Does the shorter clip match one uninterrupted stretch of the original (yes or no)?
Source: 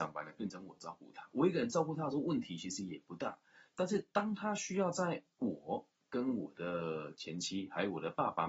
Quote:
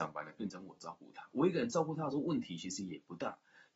yes